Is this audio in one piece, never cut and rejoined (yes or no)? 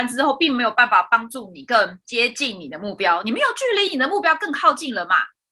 yes